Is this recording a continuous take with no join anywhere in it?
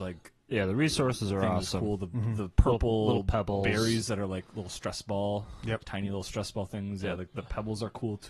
yes; 0 cuts

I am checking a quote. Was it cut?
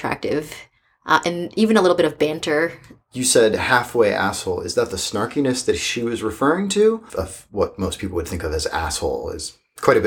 yes; 1 cut; at 7.1 s

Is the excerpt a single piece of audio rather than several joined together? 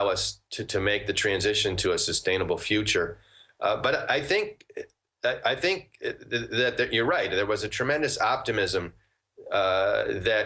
yes; 0 cuts

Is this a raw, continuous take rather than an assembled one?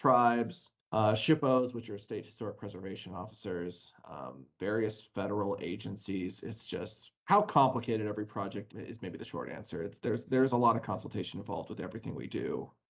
no; 1 cut; at 8.7 s

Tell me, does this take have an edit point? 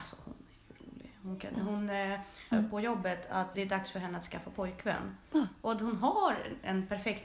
yes; 2 cuts; at 2.5 s, 3.5 s

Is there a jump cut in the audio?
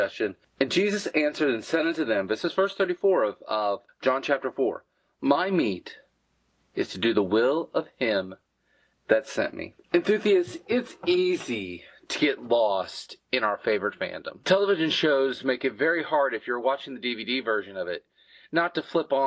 no; 0 cuts

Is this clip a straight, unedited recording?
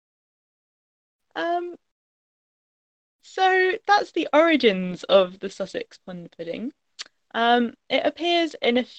yes; 0 cuts

